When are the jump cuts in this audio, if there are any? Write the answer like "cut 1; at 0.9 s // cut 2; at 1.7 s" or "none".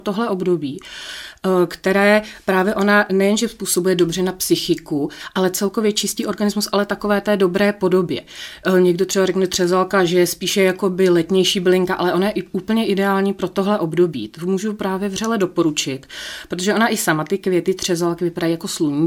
none